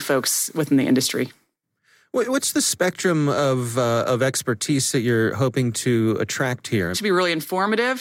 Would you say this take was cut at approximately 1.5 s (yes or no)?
no